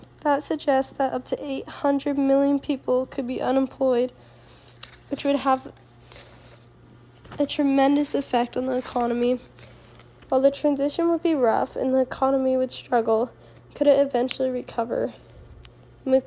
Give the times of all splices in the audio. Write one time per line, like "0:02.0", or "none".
0:10.2

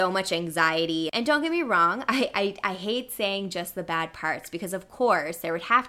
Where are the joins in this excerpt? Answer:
0:01.1

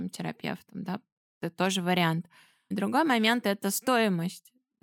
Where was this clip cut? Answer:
0:02.7

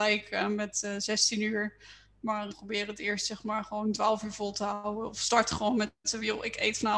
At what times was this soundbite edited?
0:02.5

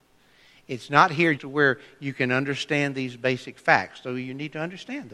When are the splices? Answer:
0:01.4

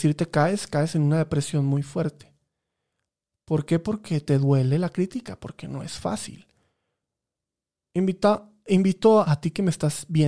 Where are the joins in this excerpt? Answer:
0:09.2

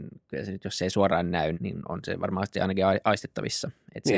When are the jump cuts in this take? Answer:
0:01.5

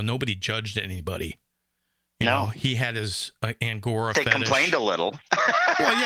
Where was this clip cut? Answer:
none

